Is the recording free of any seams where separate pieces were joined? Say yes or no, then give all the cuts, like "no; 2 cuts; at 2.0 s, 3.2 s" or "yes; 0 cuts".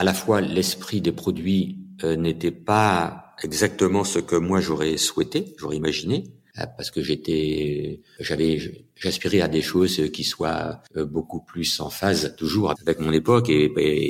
no; 1 cut; at 12.7 s